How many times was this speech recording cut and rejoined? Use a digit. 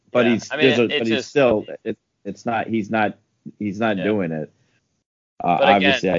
0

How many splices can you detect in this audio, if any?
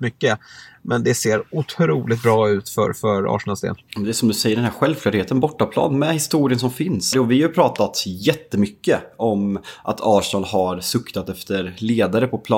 2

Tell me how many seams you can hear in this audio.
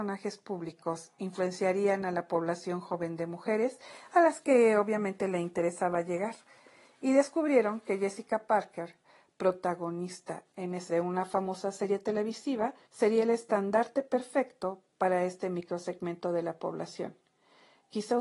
2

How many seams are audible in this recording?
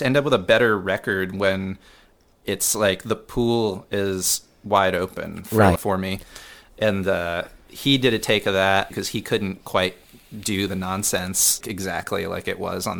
3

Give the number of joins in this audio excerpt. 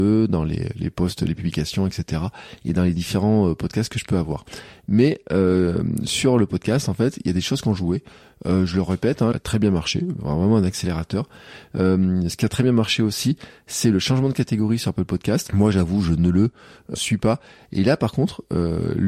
3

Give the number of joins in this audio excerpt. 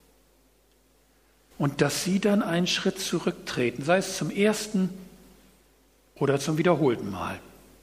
1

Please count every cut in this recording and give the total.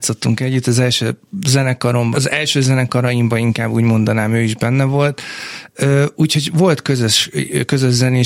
1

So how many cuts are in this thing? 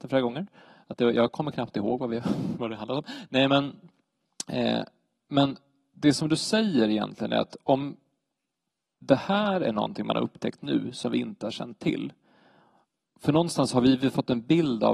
0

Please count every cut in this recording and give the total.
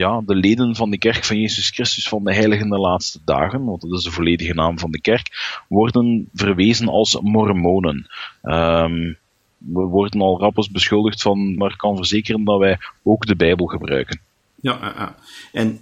1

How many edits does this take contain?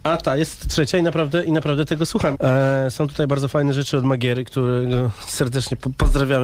1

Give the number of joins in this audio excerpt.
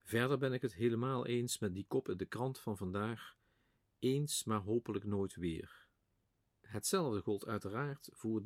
1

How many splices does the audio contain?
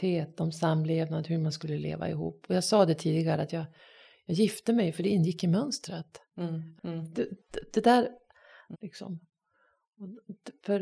2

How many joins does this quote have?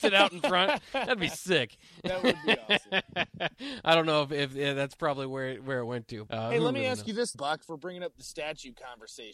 2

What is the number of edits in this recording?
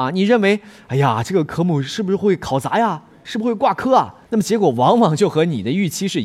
1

